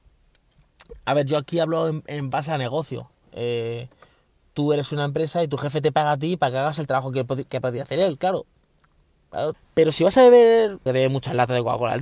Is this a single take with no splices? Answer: no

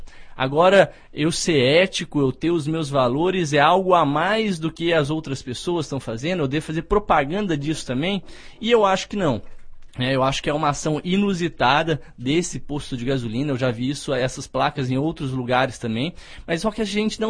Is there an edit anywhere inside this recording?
no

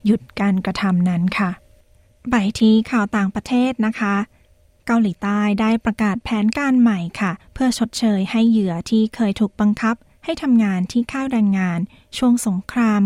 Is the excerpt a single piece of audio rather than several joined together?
yes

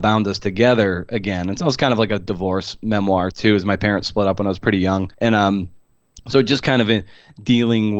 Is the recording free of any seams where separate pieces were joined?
no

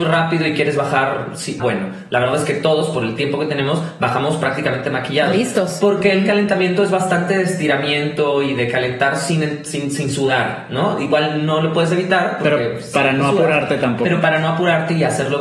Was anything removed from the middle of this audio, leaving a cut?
yes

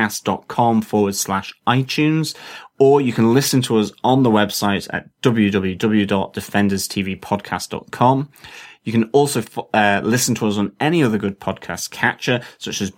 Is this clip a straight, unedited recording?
yes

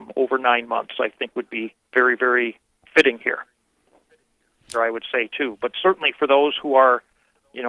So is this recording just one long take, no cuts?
no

